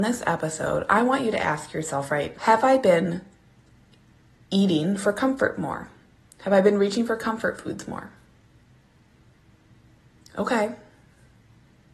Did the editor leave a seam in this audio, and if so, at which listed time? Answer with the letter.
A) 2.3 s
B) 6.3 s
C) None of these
A